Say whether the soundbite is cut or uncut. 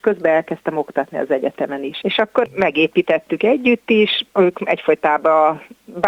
cut